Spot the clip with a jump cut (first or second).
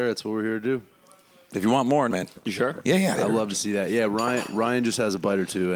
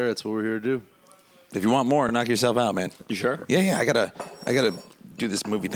first